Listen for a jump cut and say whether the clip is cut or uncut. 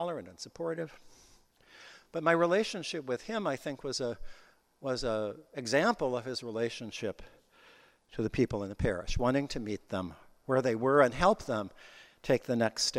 uncut